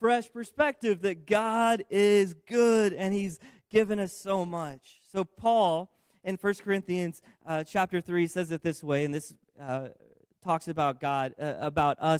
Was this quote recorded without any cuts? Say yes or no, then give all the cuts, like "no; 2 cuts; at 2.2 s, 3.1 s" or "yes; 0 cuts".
yes; 0 cuts